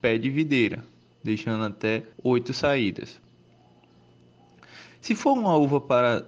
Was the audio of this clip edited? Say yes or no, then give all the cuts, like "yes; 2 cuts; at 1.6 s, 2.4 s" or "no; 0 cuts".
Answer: yes; 1 cut; at 2.1 s